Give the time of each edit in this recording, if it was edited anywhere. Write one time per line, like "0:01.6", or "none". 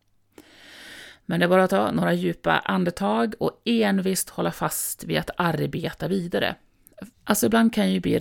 0:07.1